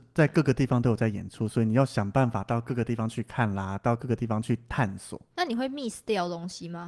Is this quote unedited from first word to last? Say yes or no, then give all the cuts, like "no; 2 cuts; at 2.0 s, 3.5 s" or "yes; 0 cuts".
yes; 0 cuts